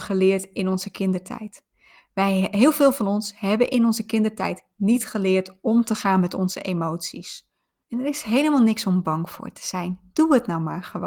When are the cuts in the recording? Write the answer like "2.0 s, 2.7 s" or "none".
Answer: 7.8 s